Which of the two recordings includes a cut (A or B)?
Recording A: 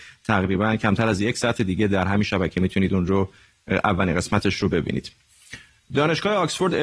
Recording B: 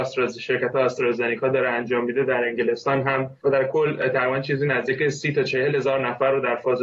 B